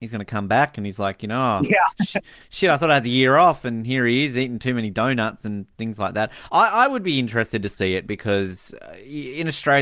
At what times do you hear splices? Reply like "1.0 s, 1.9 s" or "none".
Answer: none